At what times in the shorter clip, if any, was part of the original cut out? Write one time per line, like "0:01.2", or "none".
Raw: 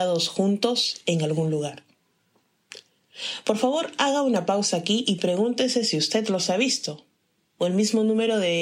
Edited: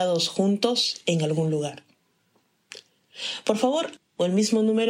0:04.0